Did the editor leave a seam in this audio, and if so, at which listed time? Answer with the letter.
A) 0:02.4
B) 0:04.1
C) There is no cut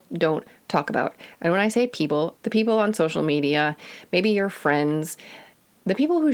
A